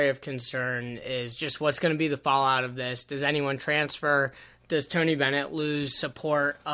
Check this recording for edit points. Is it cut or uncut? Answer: uncut